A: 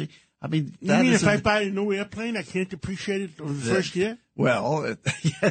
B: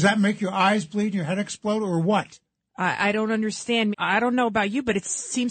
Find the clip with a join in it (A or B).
B